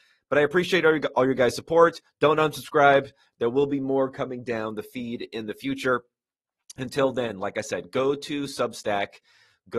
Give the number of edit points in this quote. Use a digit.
0